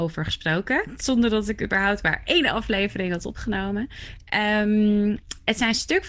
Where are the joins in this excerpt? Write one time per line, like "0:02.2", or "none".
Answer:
0:01.0